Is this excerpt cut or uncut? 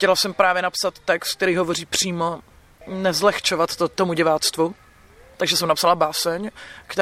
uncut